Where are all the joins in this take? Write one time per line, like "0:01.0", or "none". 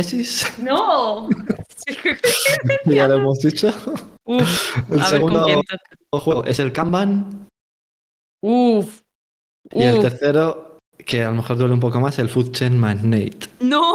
none